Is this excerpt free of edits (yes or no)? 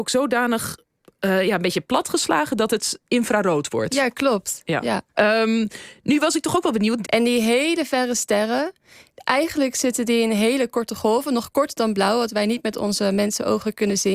no